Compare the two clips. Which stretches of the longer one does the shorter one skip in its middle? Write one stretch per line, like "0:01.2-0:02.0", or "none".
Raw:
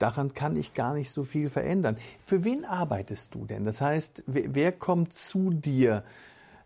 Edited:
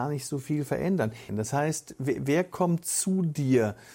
0:02.1-0:03.6